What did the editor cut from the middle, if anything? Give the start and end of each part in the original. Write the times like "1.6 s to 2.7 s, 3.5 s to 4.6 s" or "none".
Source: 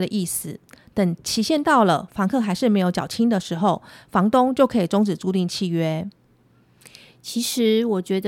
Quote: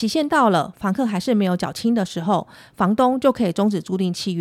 none